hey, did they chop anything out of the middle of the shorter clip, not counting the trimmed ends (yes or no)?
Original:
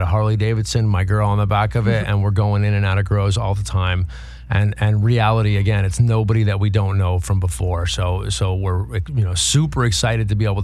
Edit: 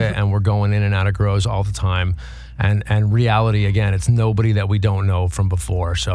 no